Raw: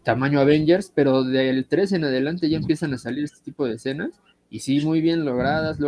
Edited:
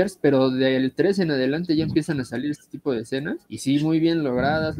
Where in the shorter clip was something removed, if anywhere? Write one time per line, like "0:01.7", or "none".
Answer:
0:03.4